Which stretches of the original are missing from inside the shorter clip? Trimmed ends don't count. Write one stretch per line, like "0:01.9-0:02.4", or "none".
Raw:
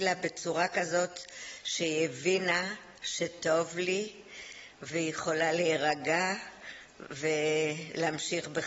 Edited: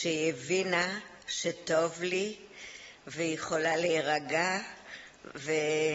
none